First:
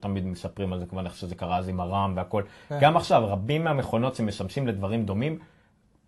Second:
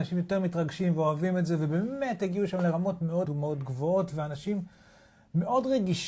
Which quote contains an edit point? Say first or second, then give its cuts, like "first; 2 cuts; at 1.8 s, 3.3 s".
second; 1 cut; at 3.2 s